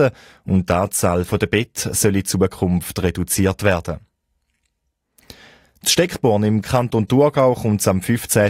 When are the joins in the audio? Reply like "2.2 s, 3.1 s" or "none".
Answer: none

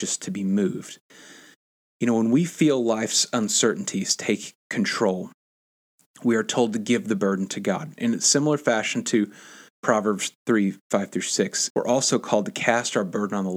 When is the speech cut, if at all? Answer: 11.7 s

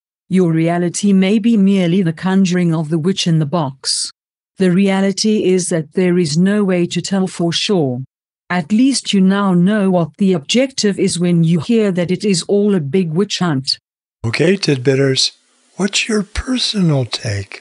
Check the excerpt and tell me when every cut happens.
none

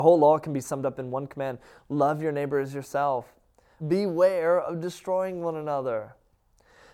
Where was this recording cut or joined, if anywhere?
3.8 s

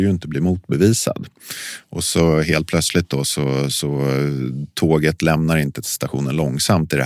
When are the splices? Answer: none

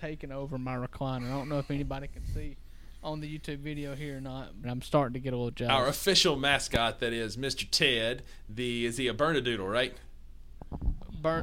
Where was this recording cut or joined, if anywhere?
4.6 s, 9.2 s

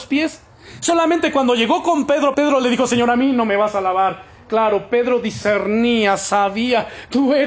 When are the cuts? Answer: 2.3 s

